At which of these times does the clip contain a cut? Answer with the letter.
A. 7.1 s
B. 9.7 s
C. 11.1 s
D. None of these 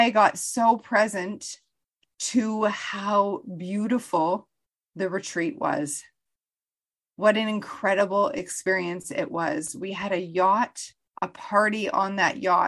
C